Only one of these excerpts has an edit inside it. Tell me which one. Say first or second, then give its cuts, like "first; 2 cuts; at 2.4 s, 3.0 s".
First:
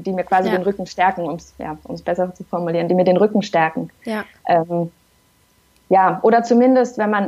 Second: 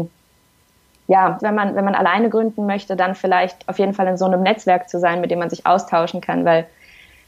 second; 1 cut; at 1.4 s